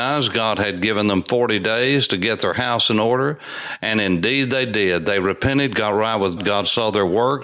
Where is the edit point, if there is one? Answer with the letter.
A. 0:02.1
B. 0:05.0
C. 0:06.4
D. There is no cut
C